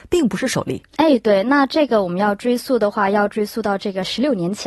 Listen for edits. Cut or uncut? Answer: uncut